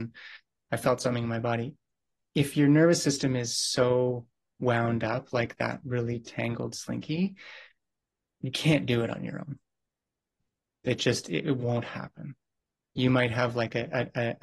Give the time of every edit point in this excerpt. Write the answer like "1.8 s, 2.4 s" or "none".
none